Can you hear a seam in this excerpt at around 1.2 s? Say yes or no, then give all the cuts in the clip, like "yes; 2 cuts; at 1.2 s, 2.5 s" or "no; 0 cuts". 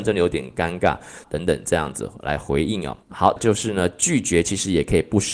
yes; 2 cuts; at 1.2 s, 3.4 s